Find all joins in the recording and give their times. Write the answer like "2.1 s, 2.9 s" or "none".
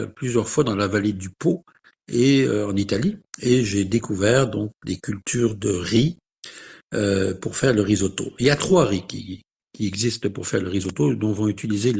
none